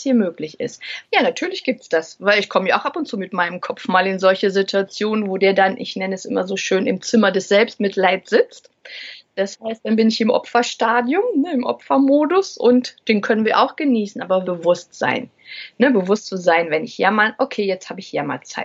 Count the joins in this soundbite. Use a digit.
2